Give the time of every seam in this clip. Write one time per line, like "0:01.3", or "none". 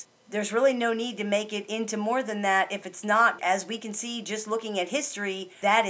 0:03.4